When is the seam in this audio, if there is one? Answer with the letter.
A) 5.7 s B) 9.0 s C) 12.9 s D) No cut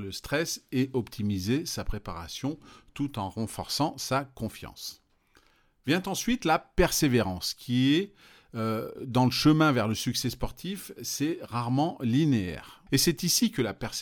C